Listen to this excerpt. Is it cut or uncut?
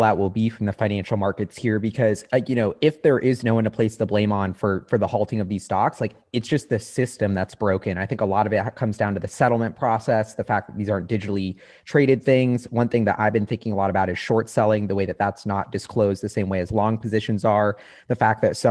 uncut